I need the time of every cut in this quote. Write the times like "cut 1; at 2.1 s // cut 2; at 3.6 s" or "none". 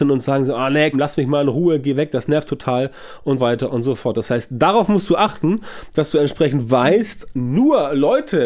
cut 1; at 0.9 s // cut 2; at 3.4 s